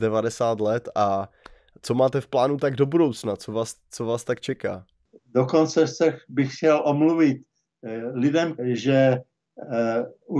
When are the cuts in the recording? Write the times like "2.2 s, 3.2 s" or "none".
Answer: 8.6 s